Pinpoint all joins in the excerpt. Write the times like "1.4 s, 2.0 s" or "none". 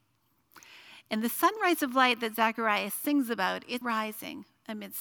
3.8 s